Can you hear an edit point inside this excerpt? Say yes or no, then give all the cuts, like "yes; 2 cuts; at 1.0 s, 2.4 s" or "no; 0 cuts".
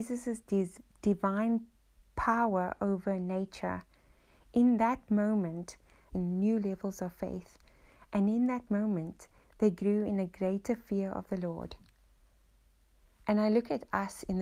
yes; 1 cut; at 6.1 s